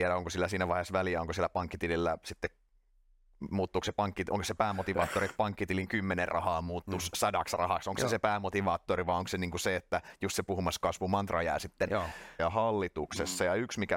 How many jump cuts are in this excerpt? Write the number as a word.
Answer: one